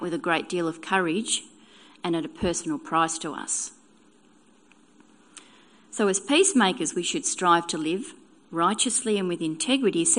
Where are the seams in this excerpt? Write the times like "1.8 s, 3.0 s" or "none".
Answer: none